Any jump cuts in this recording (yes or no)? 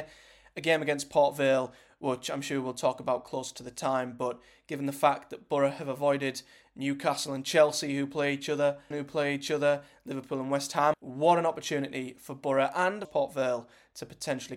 yes